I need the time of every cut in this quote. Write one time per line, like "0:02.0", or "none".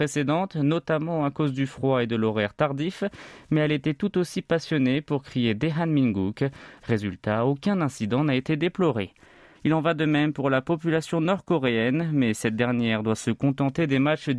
0:06.8
0:09.6